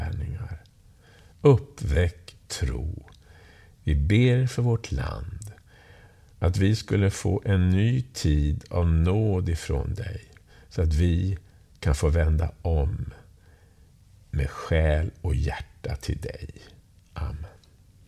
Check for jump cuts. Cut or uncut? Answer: cut